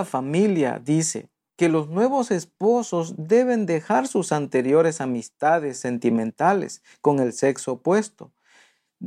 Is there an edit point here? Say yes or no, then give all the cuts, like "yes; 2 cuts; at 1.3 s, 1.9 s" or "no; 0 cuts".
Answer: no; 0 cuts